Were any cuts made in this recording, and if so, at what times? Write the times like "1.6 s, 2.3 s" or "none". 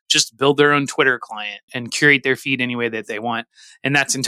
1.7 s